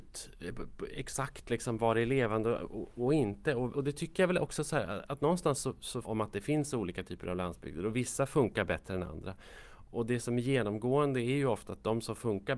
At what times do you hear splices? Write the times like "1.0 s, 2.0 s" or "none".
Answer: 3.7 s, 6.0 s